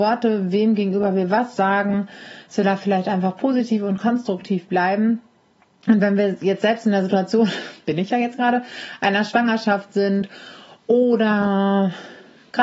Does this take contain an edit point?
no; 0 cuts

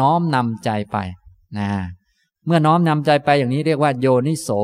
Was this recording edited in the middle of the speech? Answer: no; 0 cuts

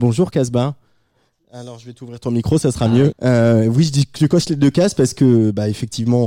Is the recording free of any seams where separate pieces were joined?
no; 1 cut; at 3.1 s

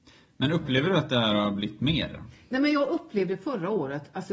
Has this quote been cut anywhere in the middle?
no; 0 cuts

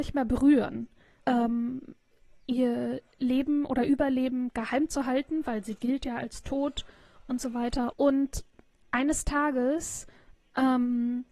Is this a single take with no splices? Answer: no; 2 cuts; at 1.2 s, 7.9 s

